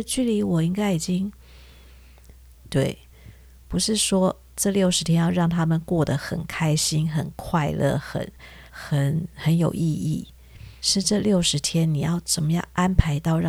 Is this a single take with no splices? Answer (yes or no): no